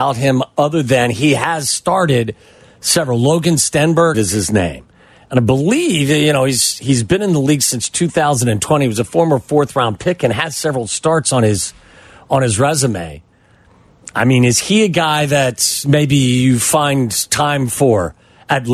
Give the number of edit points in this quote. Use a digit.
1